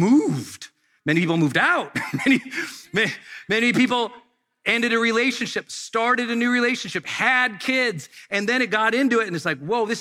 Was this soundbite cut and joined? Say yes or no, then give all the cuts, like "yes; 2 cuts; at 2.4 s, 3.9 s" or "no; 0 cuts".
no; 0 cuts